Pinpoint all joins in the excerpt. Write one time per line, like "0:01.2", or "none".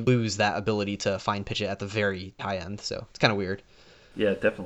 0:02.4